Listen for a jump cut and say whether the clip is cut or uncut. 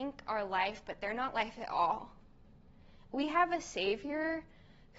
uncut